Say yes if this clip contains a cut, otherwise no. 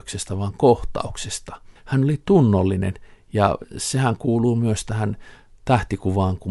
no